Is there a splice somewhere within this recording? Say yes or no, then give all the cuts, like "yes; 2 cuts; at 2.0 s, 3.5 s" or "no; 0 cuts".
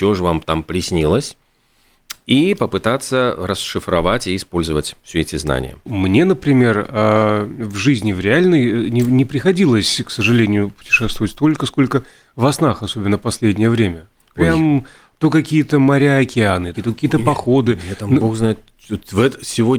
yes; 2 cuts; at 5.9 s, 16.7 s